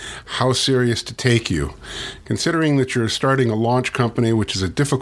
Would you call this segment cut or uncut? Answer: uncut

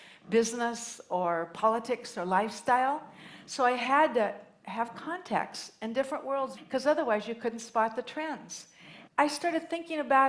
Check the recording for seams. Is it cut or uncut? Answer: cut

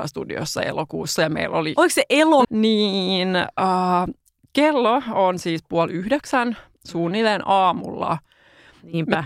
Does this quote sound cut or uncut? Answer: cut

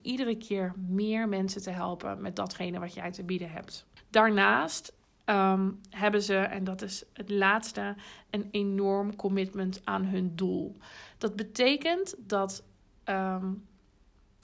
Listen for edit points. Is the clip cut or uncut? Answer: uncut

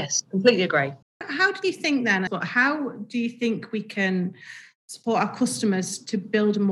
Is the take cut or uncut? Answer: cut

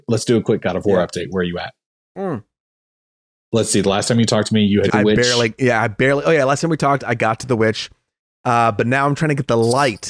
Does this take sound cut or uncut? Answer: cut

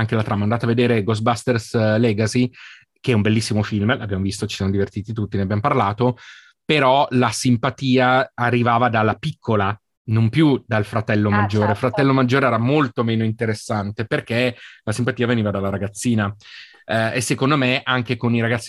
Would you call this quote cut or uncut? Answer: uncut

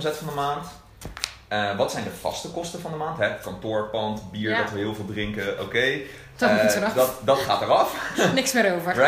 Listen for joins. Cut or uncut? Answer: uncut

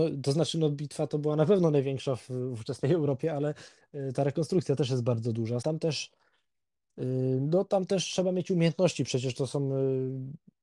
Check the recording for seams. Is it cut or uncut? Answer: cut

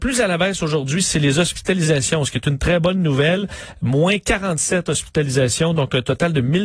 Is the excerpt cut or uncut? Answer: uncut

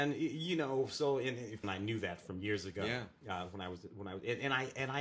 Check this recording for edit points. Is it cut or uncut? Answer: cut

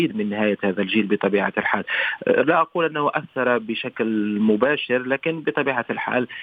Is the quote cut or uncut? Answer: uncut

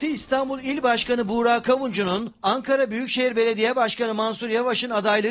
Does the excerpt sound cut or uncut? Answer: uncut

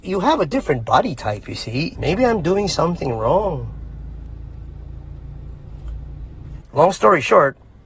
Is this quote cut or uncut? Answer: cut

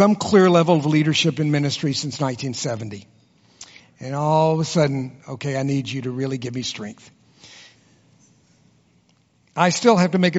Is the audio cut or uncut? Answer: cut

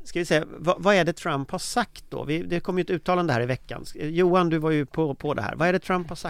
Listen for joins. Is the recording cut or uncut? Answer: uncut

